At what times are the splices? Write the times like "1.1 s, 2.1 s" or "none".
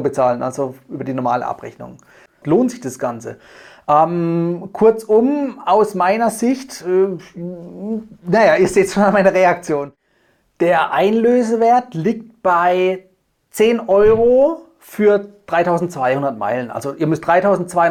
2.4 s